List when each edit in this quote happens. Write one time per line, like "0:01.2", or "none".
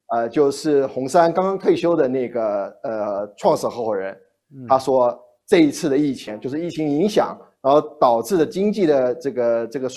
none